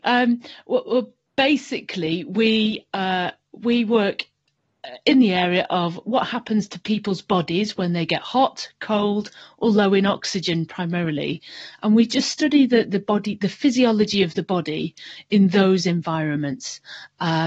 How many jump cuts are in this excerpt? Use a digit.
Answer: 0